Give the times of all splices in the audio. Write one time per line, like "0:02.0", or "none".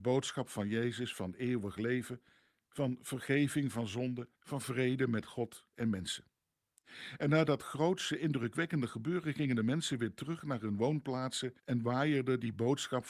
0:04.3
0:11.6